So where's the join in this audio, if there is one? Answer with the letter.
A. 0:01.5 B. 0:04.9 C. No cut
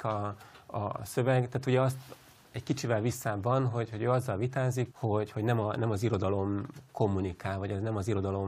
B